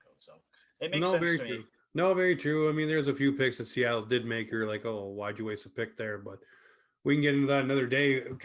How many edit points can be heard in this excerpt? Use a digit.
1